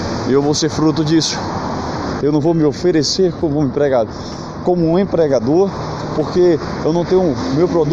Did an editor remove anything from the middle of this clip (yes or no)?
yes